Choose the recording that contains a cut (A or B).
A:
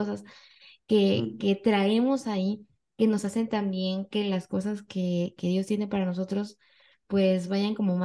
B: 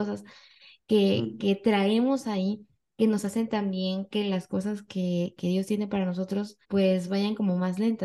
B